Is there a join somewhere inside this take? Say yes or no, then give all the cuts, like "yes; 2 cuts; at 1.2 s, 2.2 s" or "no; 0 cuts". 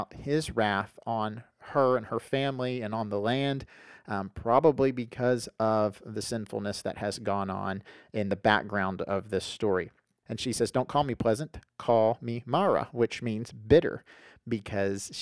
yes; 1 cut; at 10.2 s